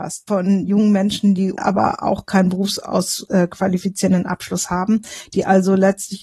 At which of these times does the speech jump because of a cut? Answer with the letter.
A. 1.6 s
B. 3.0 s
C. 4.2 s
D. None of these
A